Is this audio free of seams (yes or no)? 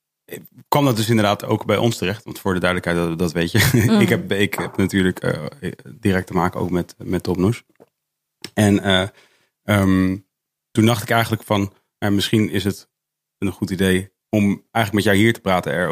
yes